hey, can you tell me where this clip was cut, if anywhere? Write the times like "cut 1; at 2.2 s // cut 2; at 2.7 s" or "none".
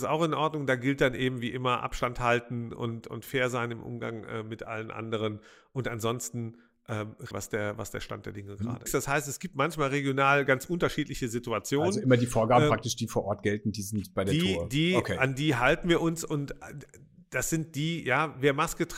cut 1; at 7.3 s // cut 2; at 8.9 s